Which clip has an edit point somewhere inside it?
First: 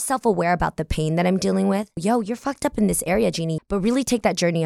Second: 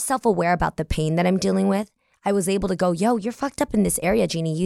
first; 2 cuts; at 2.0 s, 3.6 s

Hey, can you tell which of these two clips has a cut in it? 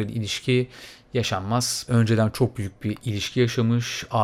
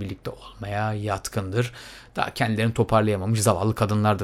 first; 1 cut; at 1.9 s

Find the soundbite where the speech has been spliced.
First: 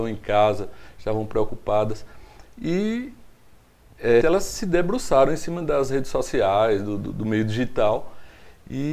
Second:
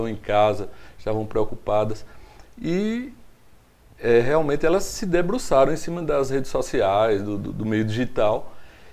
first; 1 cut; at 4.2 s

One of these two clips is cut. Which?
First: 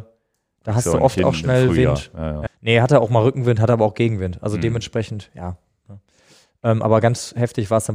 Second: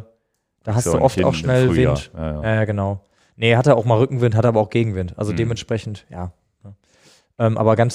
first; 1 cut; at 2.5 s

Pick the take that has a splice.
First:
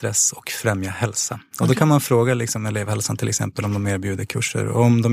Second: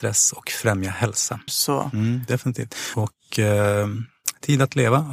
second; 2 cuts; at 1.5 s, 2.9 s

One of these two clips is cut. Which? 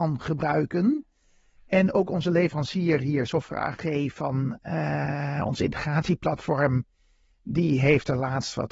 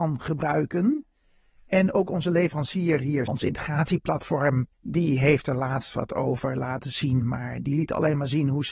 second; 2 cuts; at 3.3 s, 4.7 s

